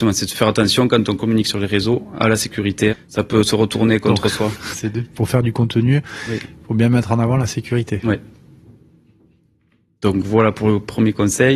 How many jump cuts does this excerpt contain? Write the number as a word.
two